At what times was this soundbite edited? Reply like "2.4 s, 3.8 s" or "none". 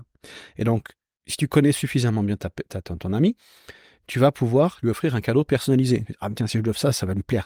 none

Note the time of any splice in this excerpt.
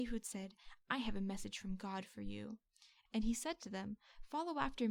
3.1 s

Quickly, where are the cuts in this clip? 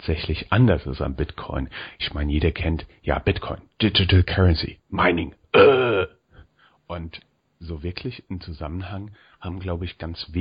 4.8 s

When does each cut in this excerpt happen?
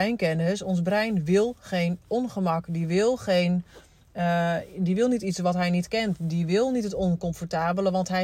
none

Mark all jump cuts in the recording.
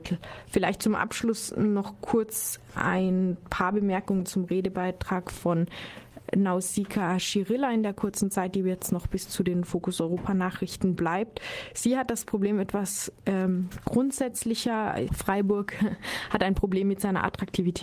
15.1 s

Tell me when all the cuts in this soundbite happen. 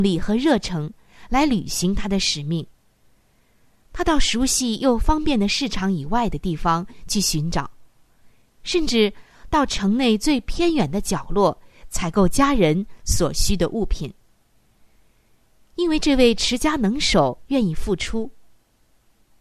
none

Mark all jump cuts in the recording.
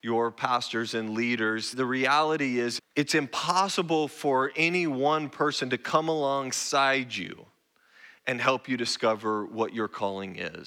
1.7 s, 2.8 s

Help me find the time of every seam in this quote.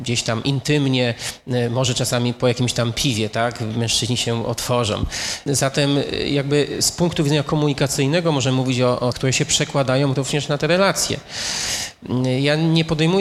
5.5 s, 9.1 s

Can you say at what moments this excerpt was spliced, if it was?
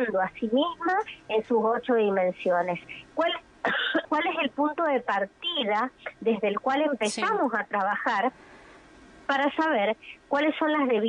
4.0 s

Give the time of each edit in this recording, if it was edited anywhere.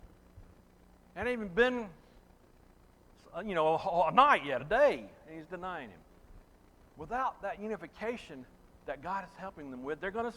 none

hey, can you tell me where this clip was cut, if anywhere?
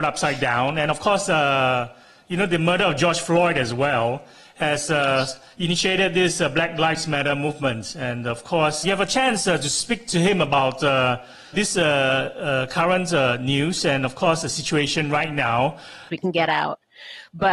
8.8 s, 11.5 s, 16.1 s

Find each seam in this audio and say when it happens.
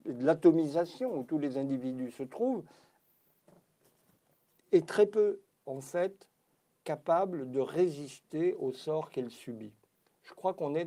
none

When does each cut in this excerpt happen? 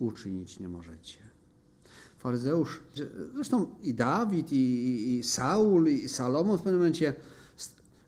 3.0 s

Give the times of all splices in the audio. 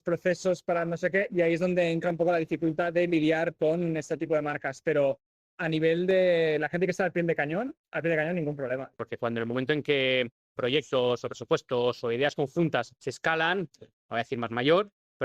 8.9 s, 13.7 s

